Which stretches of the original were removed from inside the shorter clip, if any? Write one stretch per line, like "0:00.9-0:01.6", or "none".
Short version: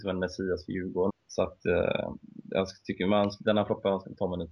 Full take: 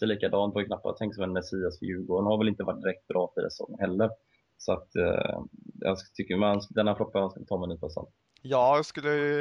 0:02.2-0:04.4

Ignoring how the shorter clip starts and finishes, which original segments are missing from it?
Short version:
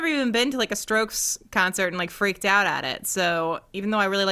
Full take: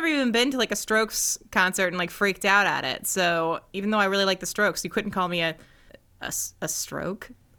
none

